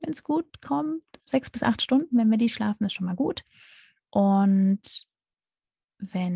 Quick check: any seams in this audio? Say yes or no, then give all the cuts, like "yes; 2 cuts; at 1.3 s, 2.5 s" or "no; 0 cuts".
yes; 2 cuts; at 1.3 s, 4.0 s